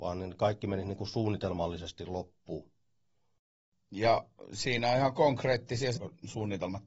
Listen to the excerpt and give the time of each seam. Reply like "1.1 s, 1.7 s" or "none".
5.9 s

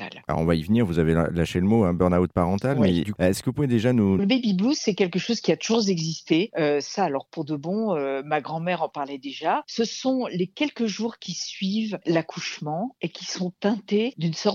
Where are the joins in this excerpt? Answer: 3.1 s, 4.2 s

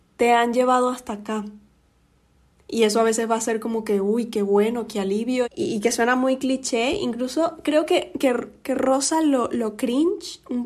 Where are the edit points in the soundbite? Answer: 5.4 s

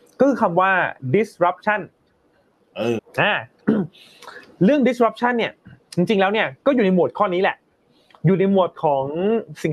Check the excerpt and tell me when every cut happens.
3.0 s

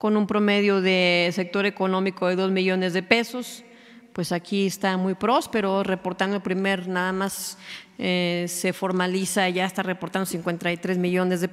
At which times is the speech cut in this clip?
none

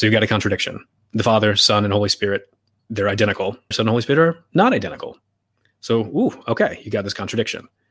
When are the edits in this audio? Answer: 3.7 s

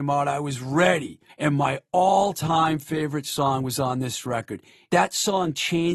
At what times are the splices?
1.3 s, 4.9 s

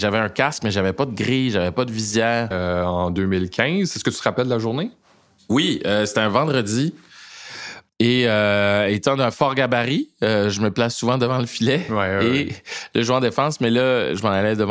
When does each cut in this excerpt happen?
2.5 s

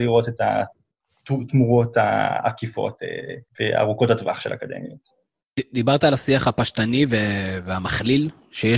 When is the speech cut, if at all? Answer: 3.5 s

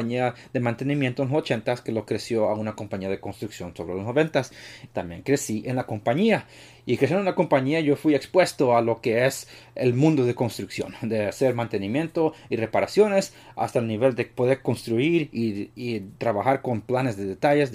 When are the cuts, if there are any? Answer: none

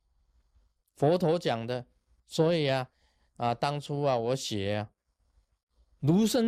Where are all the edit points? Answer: none

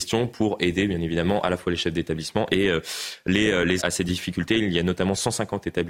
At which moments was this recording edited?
3.8 s

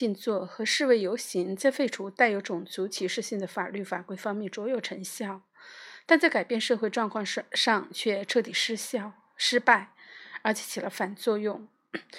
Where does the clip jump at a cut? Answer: none

